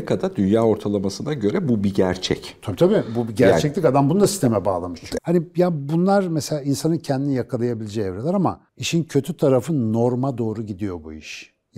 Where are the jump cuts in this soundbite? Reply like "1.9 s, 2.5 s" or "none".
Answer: 5.2 s, 8.7 s